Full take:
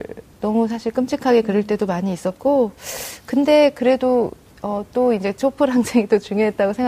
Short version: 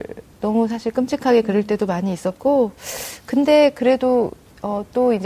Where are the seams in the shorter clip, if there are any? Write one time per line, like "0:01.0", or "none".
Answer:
none